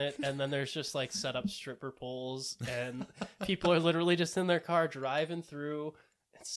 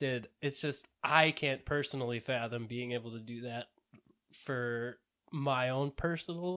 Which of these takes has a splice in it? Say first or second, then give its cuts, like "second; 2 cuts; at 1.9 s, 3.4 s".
second; 1 cut; at 0.9 s